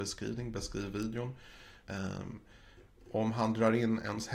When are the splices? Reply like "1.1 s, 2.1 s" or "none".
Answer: 1.8 s

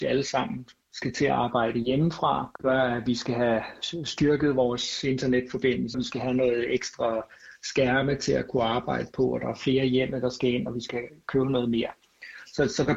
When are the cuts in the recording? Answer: 5.9 s

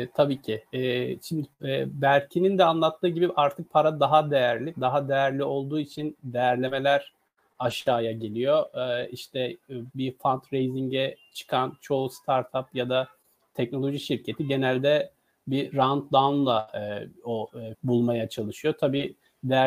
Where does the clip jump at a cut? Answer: 9.9 s, 17.7 s

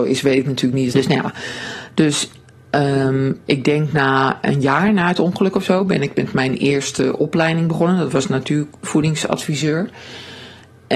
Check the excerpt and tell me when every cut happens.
0.9 s

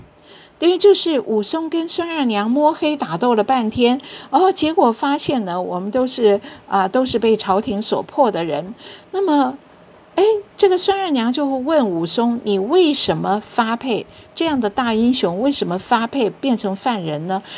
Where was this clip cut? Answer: none

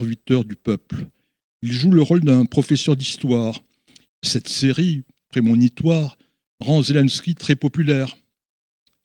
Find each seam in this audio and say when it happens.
4.1 s

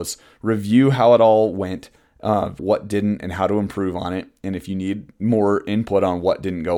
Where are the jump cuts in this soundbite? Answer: 2.6 s

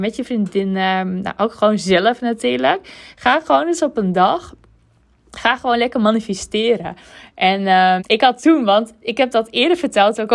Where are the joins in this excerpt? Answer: 8.0 s

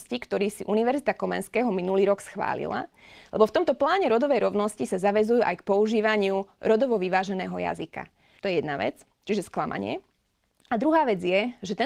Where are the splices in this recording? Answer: 8.4 s

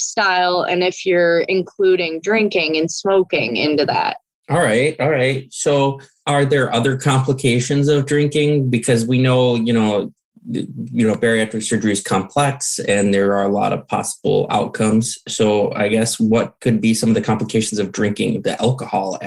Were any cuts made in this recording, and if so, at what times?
none

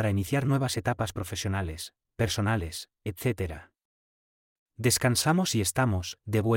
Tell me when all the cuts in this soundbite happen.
4.6 s

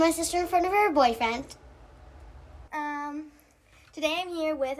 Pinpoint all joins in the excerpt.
2.7 s

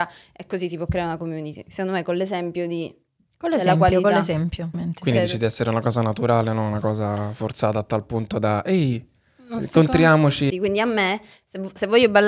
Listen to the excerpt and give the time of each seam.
4.7 s, 10.5 s

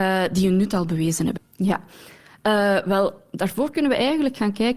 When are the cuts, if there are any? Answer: 1.4 s

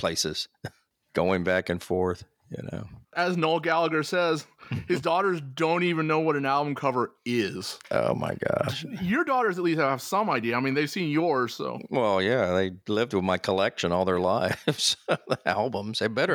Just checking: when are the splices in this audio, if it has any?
7.8 s

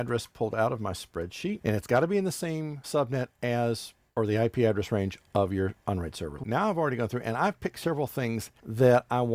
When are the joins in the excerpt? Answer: 6.4 s

